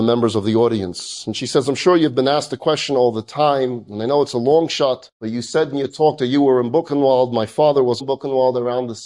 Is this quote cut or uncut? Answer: cut